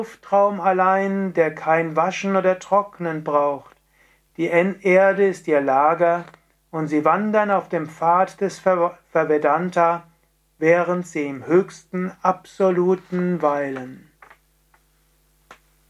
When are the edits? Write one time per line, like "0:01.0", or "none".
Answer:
none